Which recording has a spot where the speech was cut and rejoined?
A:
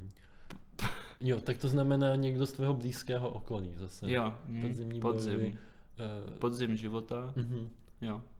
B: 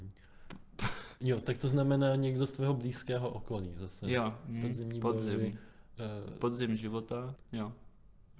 B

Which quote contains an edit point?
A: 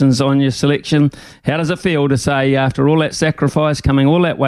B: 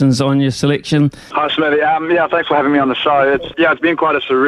B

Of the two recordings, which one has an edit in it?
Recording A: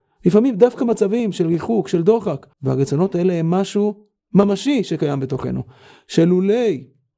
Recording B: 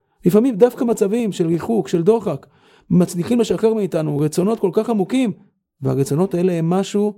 A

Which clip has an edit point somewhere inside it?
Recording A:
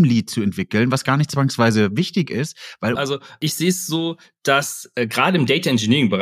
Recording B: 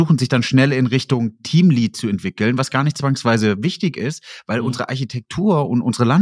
A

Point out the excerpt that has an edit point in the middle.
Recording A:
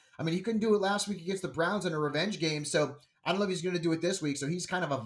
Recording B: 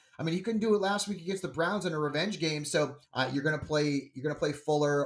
B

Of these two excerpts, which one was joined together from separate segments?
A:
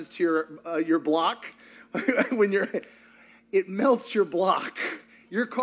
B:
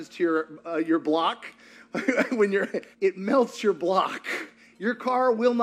B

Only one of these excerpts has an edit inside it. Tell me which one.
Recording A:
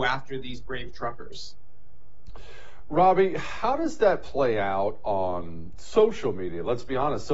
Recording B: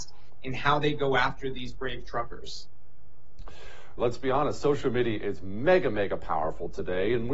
B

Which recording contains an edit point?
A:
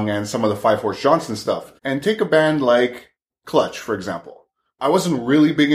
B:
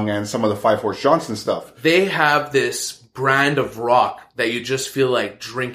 A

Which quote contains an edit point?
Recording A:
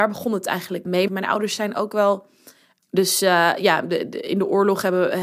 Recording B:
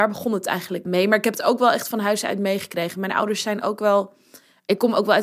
A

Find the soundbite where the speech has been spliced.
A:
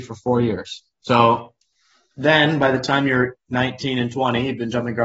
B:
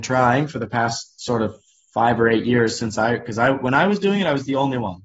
A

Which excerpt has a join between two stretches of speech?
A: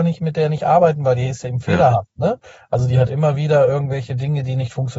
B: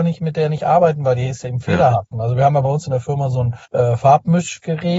B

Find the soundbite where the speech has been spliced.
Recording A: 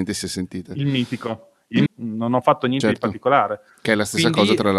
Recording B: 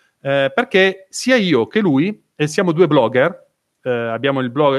A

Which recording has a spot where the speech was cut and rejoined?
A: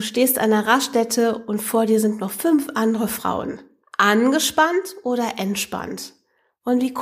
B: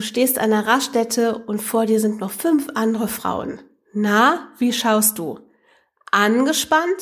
A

